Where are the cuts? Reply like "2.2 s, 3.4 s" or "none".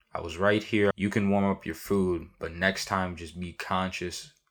0.9 s